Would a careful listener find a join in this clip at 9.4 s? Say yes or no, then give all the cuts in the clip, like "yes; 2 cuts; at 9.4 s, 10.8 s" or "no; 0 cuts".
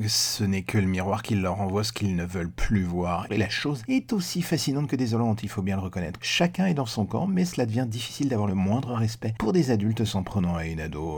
no; 2 cuts; at 3.3 s, 6.2 s